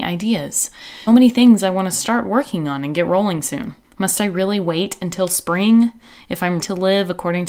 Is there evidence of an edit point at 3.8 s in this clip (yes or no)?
yes